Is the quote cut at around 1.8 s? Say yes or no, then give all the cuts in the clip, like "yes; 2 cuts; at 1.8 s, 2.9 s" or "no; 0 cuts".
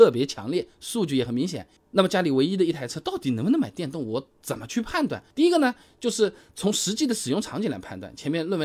yes; 2 cuts; at 1.8 s, 5.3 s